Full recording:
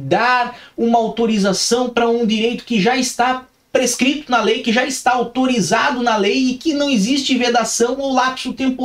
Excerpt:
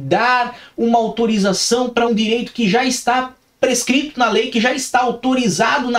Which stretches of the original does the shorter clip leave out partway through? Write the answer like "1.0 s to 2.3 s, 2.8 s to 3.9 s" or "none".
2.1 s to 2.2 s